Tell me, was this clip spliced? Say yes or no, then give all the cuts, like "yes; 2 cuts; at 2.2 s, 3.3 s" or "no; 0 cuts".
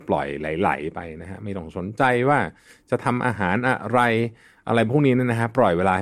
no; 0 cuts